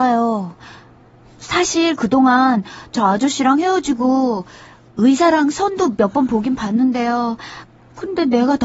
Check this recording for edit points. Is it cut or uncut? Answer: uncut